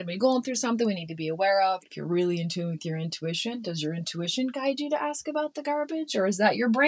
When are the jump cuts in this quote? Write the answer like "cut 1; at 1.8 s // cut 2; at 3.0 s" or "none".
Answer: cut 1; at 1.8 s